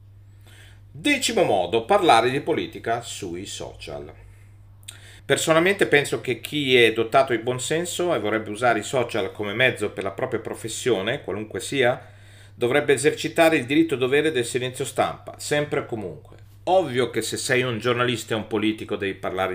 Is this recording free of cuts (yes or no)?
no